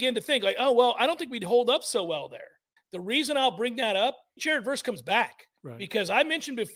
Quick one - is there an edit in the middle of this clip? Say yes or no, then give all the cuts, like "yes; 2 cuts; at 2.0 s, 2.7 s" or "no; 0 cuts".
yes; 3 cuts; at 2.8 s, 4.4 s, 5.6 s